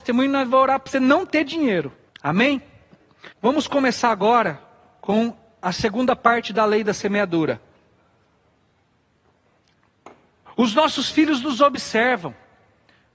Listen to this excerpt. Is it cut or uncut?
cut